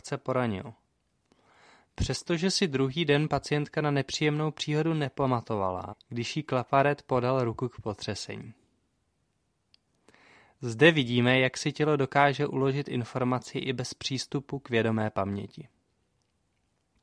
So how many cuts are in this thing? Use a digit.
1